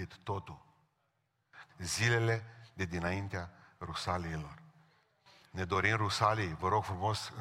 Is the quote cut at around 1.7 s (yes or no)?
yes